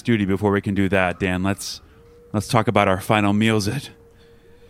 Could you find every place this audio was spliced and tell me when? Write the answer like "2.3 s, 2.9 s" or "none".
none